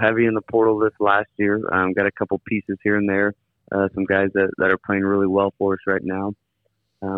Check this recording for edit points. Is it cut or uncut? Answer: uncut